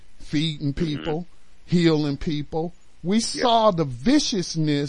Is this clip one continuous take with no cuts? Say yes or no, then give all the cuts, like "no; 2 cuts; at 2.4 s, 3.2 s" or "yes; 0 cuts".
no; 1 cut; at 3.0 s